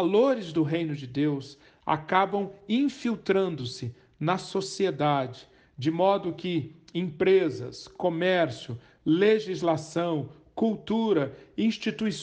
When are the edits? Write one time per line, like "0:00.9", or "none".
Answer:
none